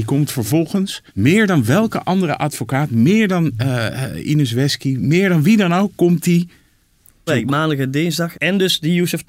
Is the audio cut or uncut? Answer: cut